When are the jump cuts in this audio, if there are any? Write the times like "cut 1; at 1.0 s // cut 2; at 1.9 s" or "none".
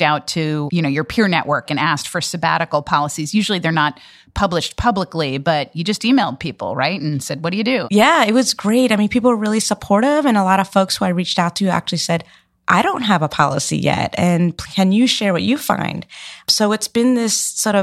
cut 1; at 1.7 s